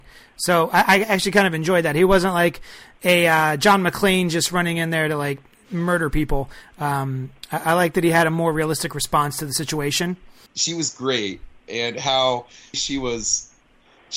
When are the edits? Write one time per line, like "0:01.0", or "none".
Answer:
0:10.5
0:12.7